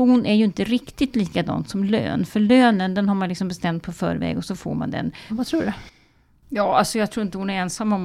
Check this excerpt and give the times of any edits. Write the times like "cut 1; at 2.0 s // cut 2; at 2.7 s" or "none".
cut 1; at 5.3 s